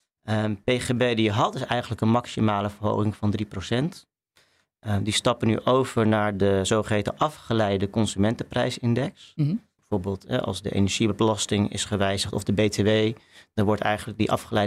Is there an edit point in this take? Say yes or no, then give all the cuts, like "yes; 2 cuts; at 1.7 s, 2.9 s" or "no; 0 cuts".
yes; 1 cut; at 9.8 s